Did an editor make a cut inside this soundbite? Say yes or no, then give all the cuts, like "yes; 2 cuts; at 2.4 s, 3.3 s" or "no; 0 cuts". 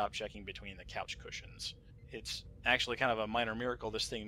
no; 0 cuts